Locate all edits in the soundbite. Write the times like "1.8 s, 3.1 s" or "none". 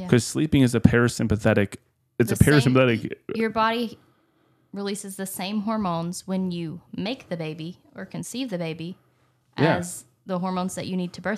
2.0 s